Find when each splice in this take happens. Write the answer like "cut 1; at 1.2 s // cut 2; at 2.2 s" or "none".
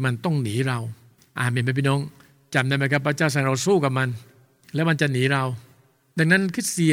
none

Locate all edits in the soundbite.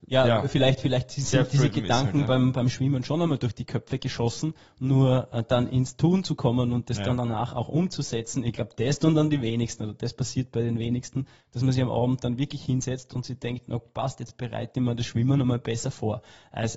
none

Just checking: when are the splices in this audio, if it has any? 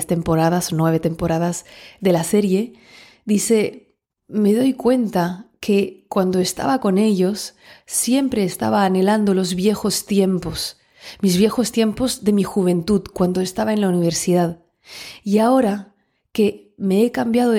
none

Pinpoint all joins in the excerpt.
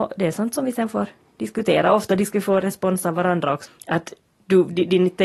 cut 1; at 3.7 s

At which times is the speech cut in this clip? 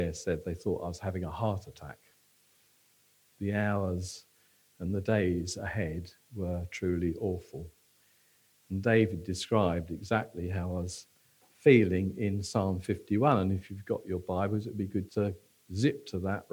cut 1; at 15.1 s

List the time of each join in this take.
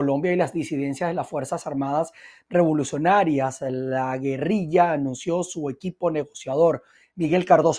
none

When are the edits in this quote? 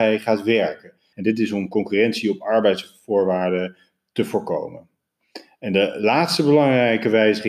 cut 1; at 1.1 s

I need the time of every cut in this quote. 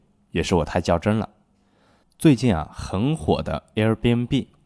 cut 1; at 2.0 s

